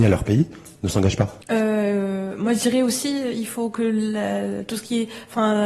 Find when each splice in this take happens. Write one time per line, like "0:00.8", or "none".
0:01.4